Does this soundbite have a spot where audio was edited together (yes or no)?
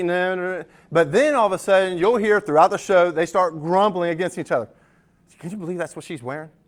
no